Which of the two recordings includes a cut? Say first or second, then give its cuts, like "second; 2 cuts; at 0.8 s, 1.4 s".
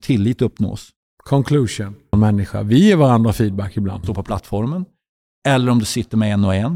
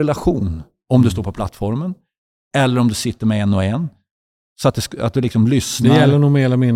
first; 2 cuts; at 2.1 s, 4.0 s